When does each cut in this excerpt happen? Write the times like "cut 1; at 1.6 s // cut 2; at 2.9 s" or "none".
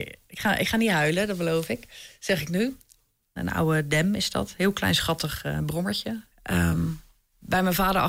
cut 1; at 3.4 s // cut 2; at 6.3 s

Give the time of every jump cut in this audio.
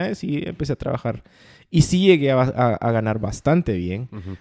none

